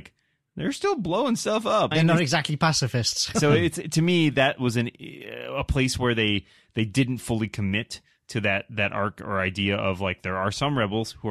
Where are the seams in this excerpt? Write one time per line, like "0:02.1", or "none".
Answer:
0:01.9
0:03.3

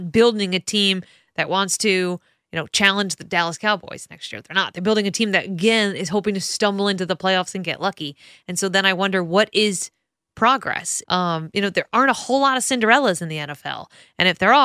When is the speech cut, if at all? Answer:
0:11.0

